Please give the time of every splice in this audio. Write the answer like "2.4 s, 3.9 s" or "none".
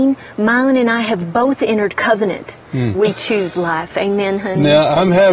2.9 s